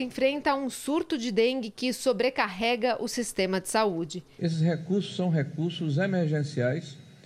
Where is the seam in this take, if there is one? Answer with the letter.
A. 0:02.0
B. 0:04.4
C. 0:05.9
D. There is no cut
B